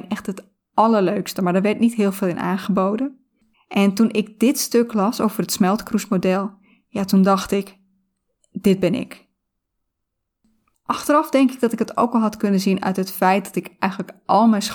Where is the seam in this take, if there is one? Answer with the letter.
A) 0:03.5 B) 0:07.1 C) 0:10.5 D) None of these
A